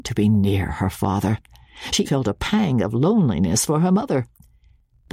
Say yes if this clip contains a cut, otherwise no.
yes